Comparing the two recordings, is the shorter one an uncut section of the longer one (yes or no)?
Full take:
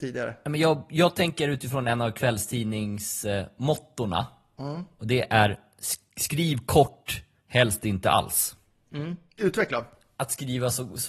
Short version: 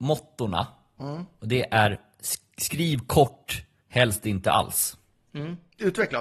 yes